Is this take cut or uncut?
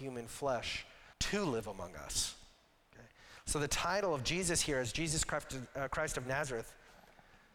cut